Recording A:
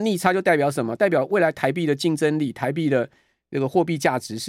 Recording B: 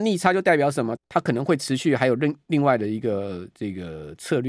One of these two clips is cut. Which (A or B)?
B